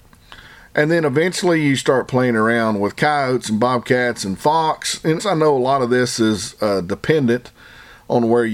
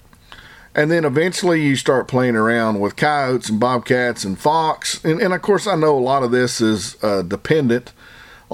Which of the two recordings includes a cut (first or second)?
first